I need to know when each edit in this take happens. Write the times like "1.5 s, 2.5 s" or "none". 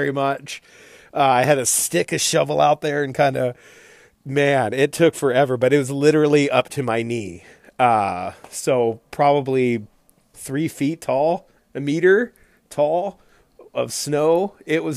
10.3 s, 11.6 s